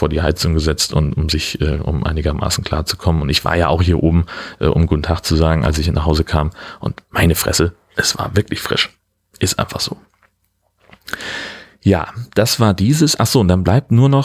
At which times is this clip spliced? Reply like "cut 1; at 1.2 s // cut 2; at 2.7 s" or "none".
none